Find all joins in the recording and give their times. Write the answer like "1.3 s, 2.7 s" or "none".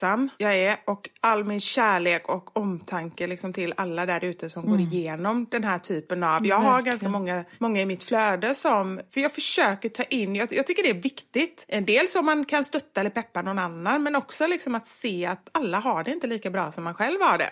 none